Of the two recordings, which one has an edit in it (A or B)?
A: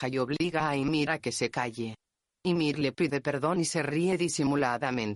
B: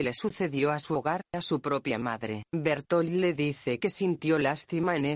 B